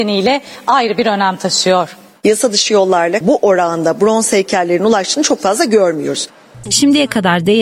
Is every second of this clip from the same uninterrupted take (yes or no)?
no